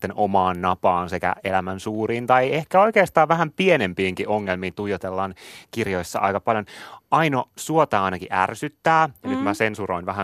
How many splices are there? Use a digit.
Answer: 0